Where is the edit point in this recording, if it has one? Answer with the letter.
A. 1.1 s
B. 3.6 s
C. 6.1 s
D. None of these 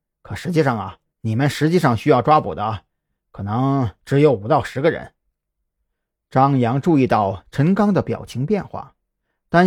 A